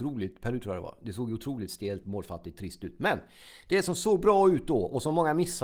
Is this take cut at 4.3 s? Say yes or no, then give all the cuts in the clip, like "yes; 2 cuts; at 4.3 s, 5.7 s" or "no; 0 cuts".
no; 1 cut; at 2.0 s